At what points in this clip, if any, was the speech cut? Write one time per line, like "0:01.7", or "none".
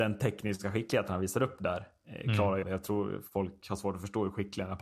0:02.6